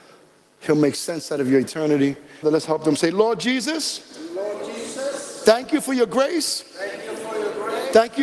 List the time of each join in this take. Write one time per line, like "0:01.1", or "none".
0:02.4